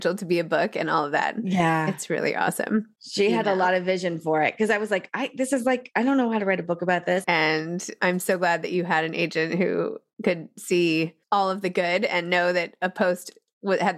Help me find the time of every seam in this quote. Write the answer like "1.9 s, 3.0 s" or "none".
3.0 s, 7.2 s